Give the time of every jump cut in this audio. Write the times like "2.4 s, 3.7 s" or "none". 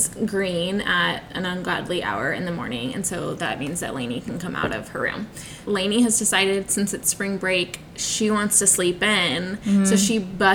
5.6 s